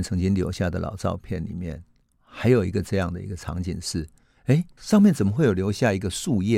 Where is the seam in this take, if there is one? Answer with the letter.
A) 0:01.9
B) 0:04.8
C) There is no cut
B